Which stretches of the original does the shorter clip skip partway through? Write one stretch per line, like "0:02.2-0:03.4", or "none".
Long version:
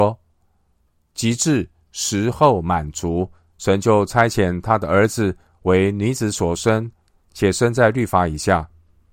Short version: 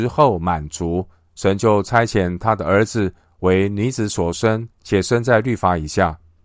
0:07.0-0:07.2